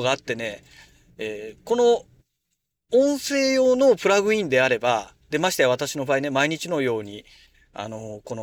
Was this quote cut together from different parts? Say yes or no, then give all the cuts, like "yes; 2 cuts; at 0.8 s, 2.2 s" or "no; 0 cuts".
no; 0 cuts